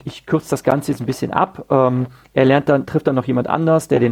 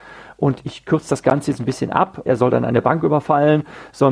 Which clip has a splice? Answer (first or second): second